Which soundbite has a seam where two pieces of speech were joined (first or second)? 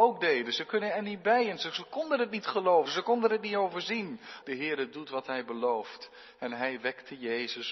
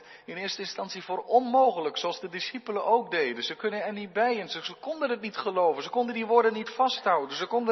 first